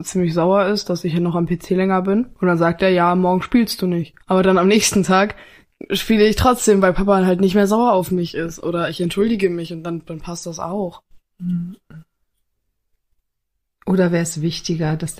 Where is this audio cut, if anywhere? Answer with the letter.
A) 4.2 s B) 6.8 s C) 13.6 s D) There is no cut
A